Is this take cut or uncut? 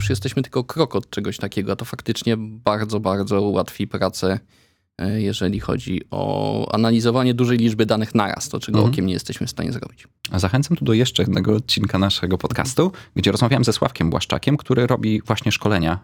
uncut